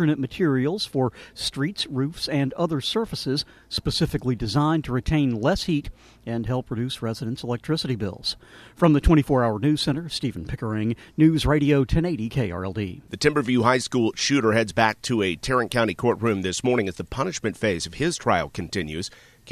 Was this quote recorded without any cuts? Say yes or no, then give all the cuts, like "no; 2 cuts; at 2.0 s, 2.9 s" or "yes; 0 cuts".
yes; 0 cuts